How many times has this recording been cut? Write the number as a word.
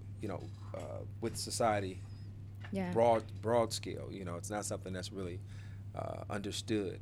zero